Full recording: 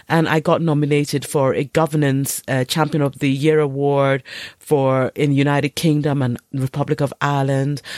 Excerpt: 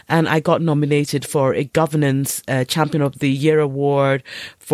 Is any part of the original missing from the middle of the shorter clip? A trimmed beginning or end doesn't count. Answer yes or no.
no